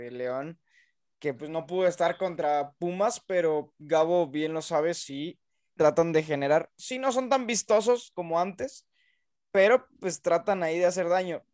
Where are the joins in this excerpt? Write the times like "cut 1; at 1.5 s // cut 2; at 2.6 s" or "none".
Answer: cut 1; at 5.8 s